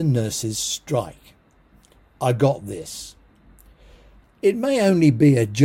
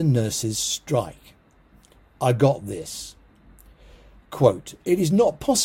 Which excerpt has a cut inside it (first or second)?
first